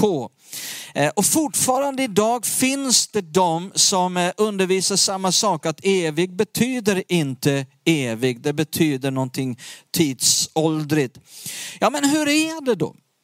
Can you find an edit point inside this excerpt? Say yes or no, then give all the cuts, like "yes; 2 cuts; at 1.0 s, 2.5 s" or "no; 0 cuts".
no; 0 cuts